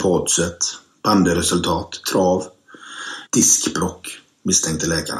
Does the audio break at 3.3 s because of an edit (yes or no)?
yes